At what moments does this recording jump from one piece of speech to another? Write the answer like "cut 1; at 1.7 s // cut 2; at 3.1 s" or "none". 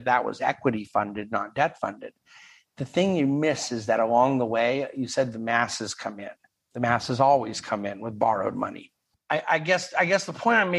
cut 1; at 6.6 s // cut 2; at 9.1 s